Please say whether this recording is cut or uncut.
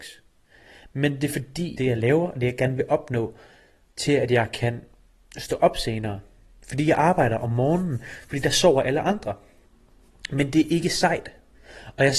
cut